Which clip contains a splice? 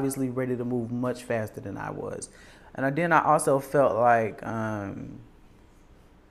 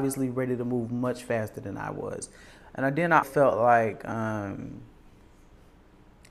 second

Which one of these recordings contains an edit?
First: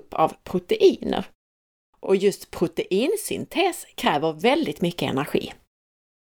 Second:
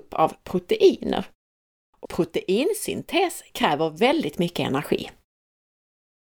second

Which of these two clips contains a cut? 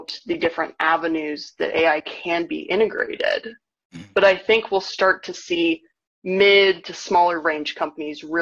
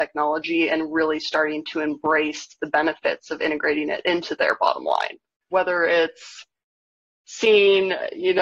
second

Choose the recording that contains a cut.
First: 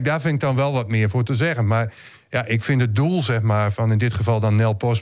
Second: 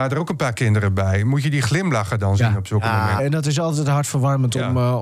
second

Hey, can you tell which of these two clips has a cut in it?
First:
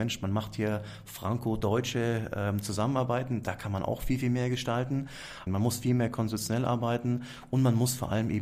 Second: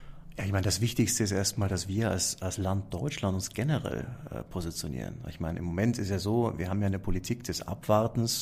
first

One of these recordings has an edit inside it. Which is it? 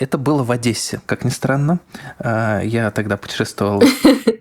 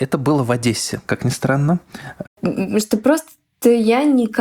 second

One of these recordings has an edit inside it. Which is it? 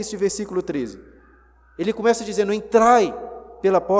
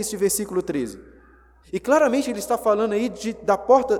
second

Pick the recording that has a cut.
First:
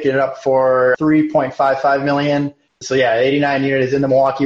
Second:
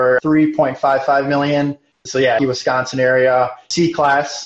second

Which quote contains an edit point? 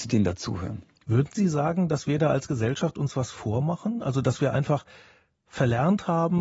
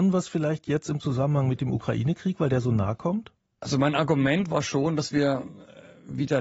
first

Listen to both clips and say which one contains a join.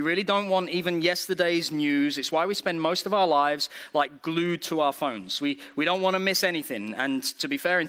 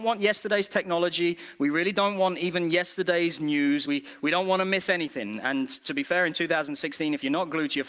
second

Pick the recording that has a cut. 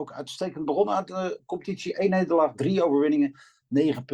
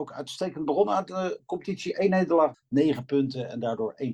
second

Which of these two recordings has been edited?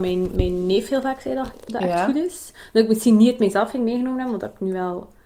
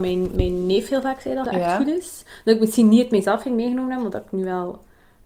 second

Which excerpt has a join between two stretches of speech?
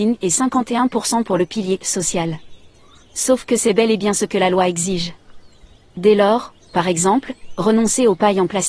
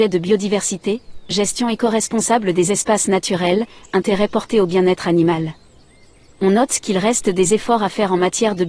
first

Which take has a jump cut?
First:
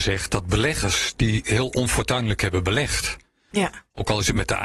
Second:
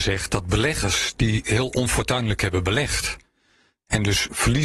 first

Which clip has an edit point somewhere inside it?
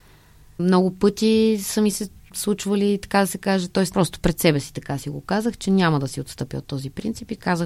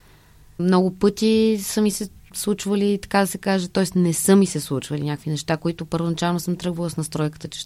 first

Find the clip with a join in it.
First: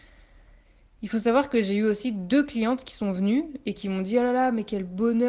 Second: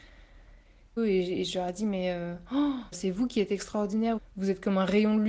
second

